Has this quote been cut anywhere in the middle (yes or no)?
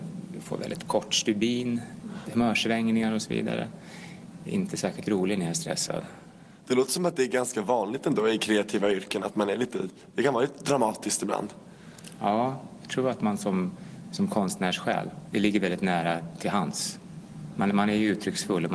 yes